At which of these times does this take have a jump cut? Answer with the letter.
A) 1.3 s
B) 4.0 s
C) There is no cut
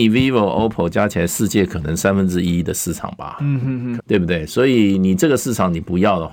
B